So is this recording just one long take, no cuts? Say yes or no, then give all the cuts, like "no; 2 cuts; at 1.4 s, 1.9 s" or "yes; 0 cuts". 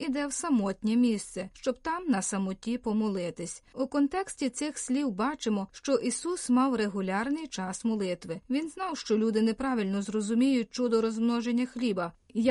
yes; 0 cuts